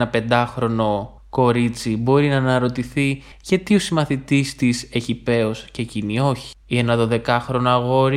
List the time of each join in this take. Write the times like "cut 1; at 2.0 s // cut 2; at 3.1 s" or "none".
none

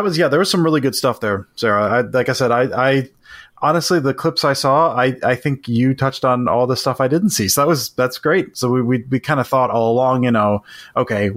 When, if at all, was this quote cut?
cut 1; at 8.5 s

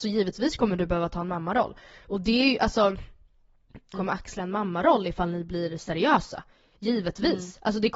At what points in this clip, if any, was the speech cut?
cut 1; at 3.9 s

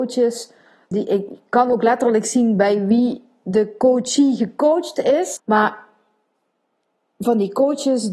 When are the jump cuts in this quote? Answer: cut 1; at 0.9 s // cut 2; at 5.4 s

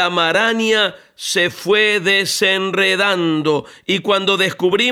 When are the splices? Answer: none

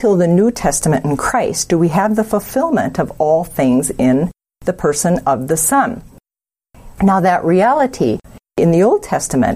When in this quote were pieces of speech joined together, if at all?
cut 1; at 7.0 s

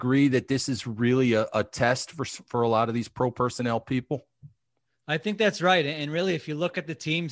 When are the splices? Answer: none

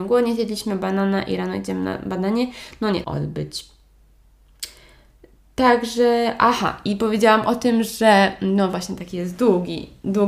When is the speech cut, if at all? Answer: cut 1; at 3.0 s

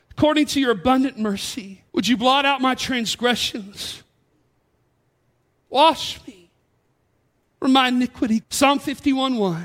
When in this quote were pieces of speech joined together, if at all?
cut 1; at 1.9 s // cut 2; at 8.4 s

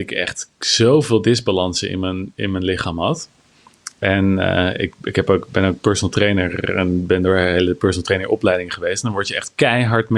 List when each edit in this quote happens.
none

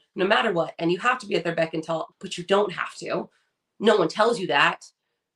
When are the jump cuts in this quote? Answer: cut 1; at 2.1 s

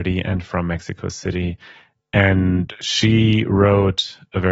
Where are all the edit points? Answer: none

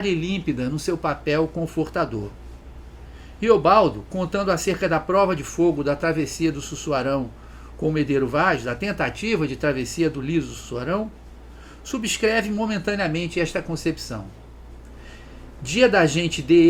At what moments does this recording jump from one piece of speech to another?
none

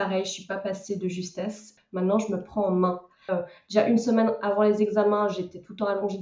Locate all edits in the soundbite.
cut 1; at 1.8 s // cut 2; at 3.3 s

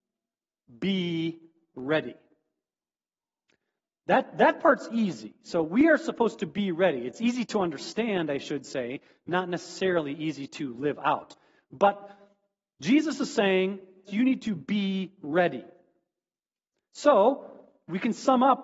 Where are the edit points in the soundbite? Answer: cut 1; at 14.1 s

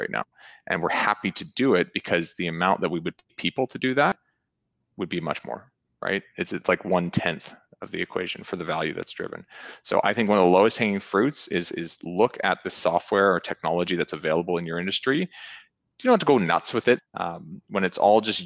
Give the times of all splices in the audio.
cut 1; at 17.0 s

